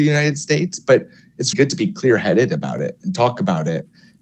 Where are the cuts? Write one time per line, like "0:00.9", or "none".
0:01.5